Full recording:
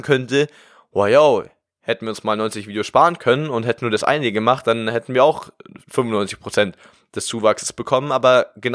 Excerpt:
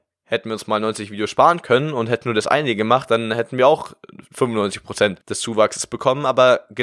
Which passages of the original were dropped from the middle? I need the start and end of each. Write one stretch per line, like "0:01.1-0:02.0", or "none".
0:06.8-0:07.1